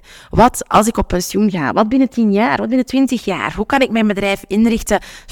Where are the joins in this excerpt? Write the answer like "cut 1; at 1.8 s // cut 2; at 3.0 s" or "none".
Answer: none